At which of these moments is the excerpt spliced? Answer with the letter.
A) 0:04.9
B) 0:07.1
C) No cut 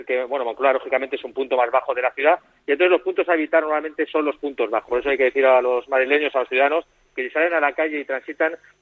A